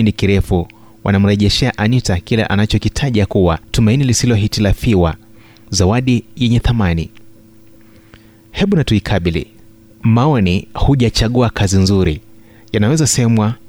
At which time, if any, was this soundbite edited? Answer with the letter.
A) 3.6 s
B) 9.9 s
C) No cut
A